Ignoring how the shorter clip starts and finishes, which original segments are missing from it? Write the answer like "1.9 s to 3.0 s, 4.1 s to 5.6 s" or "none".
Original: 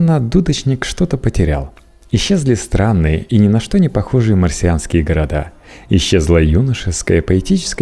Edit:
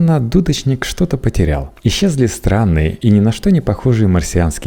1.8 s to 2.1 s